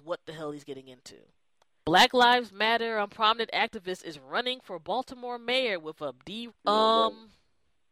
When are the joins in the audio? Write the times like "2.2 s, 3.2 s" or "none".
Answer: 1.8 s, 6.5 s